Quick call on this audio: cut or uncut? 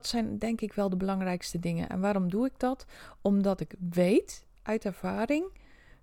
uncut